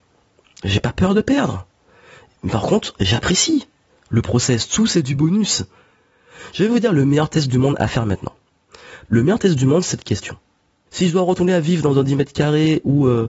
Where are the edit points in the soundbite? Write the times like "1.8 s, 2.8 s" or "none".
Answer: 9.1 s, 10.9 s

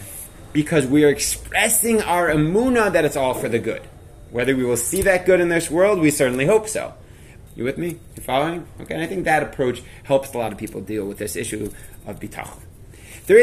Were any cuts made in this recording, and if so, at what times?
7.5 s

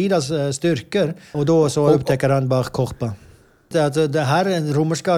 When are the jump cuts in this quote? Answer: 1.3 s, 3.7 s

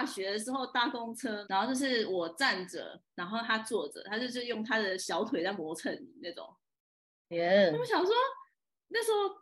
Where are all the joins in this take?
1.4 s

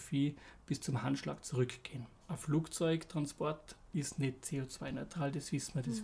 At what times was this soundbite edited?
2.2 s

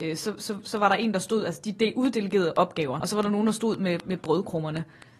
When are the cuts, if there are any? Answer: 3.0 s

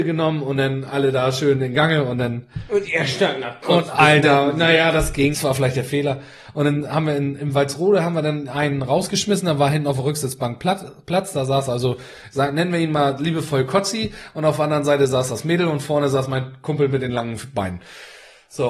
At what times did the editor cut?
5.3 s

